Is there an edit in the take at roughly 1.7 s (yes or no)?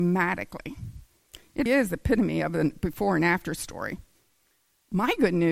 yes